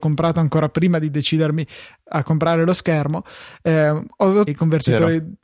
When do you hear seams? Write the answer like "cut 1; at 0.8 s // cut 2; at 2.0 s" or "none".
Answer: cut 1; at 4.5 s

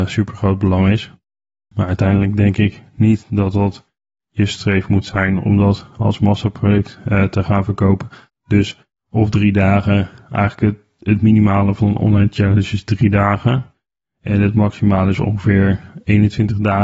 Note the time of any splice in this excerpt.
cut 1; at 1.7 s // cut 2; at 8.3 s

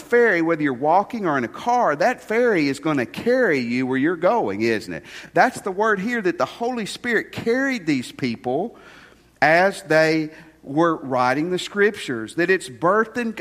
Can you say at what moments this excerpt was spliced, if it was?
none

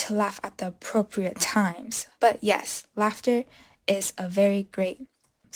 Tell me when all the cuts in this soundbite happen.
cut 1; at 2.2 s

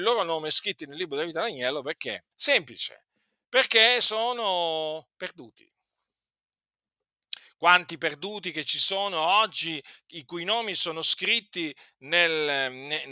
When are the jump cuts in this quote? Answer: cut 1; at 2.3 s

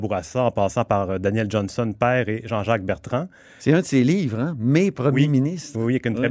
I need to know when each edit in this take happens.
none

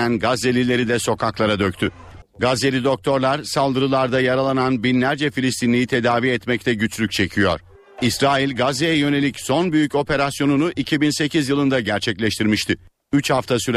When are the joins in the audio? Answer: cut 1; at 2.2 s

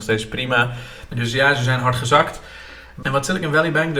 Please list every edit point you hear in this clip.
cut 1; at 1.1 s // cut 2; at 3.0 s

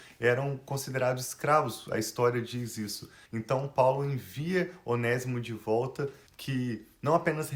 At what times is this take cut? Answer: cut 1; at 3.3 s // cut 2; at 6.3 s

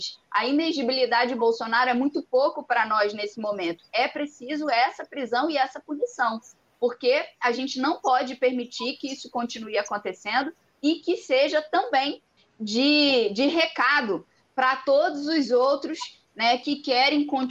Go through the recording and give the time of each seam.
none

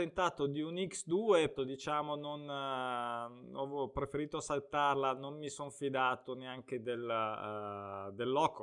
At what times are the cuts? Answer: cut 1; at 1.6 s

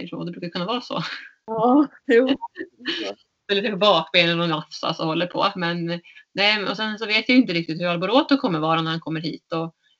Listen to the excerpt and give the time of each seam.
none

